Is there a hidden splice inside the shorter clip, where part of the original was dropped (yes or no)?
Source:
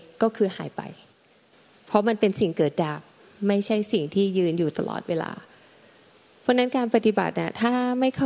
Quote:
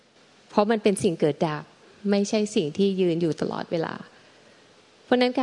no